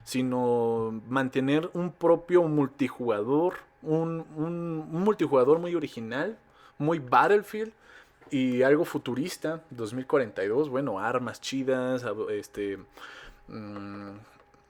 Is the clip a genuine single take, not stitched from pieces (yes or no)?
yes